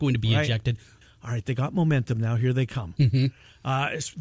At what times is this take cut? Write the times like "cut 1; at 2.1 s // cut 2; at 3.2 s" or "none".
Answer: cut 1; at 1.0 s